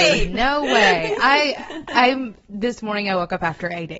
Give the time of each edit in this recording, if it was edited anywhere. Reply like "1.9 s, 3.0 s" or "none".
none